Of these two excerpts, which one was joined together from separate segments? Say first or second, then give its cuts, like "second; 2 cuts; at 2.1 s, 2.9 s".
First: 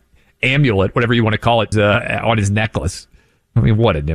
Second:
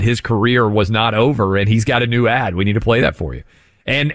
first; 1 cut; at 1.7 s